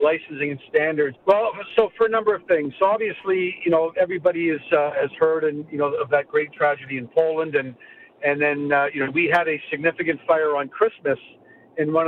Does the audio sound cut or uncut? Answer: cut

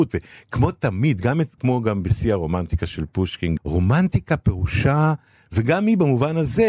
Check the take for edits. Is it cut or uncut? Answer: cut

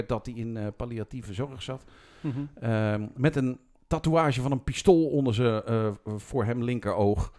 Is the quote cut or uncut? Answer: uncut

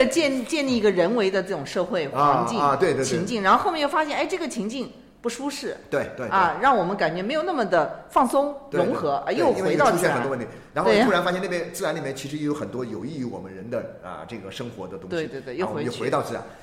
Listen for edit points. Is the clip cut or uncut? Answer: uncut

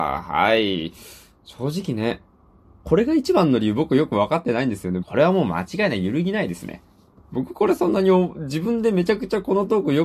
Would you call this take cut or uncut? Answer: cut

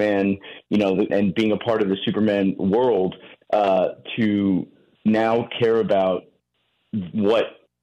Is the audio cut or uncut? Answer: cut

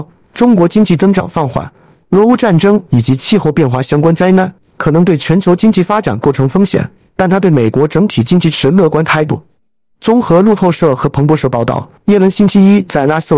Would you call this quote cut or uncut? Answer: cut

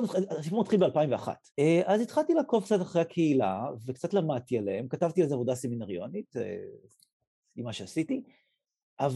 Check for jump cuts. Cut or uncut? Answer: cut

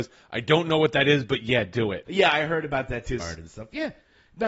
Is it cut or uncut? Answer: cut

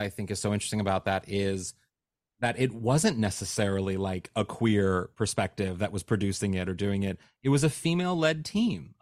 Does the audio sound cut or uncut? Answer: uncut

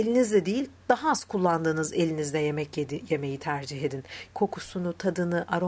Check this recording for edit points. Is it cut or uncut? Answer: cut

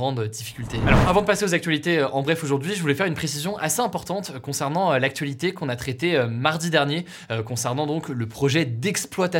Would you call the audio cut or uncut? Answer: uncut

